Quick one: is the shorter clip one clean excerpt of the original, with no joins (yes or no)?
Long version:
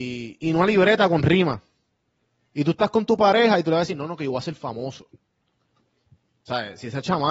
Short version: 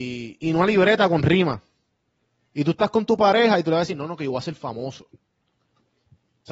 yes